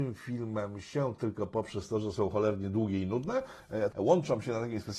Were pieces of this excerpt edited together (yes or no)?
yes